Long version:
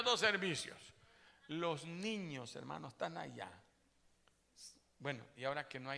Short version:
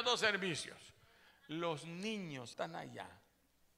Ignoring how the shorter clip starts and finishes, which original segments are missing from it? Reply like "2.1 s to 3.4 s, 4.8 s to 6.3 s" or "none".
2.5 s to 3.0 s